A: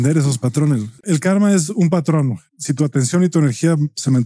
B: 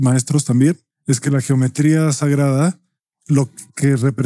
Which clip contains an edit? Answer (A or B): A